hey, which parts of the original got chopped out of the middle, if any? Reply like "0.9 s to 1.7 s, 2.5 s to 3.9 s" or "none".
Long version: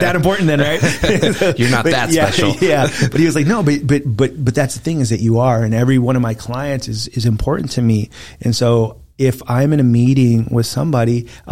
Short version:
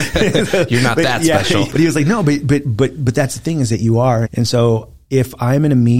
2.6 s to 3.1 s, 5.7 s to 8.3 s